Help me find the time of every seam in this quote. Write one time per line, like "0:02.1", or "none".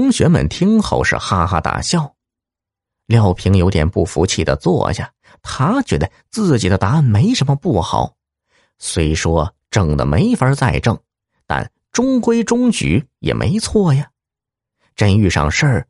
none